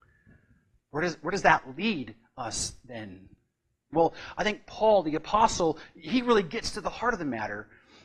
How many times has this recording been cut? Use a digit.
1